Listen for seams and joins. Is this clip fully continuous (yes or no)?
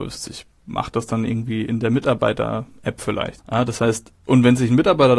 no